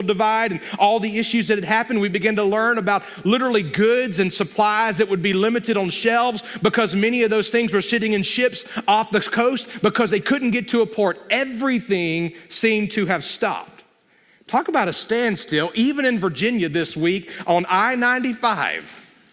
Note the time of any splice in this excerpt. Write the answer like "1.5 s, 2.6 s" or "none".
none

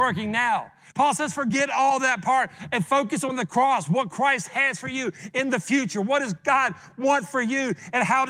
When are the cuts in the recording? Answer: 0.9 s

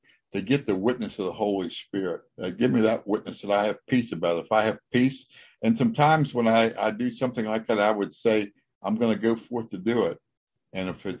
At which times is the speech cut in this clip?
2.3 s

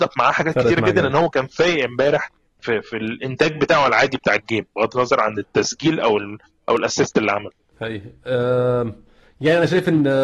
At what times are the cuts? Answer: 7.7 s

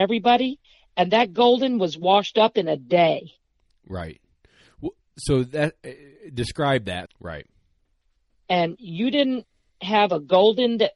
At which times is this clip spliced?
7.0 s

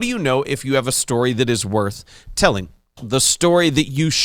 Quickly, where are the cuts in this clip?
3.0 s

